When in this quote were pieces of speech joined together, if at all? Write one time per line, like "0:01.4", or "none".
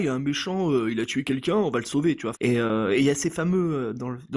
0:02.3